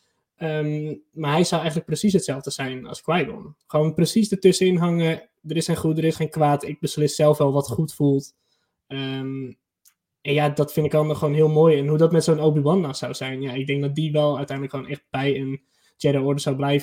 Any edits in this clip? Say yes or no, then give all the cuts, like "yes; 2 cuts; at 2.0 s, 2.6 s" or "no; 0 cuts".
no; 0 cuts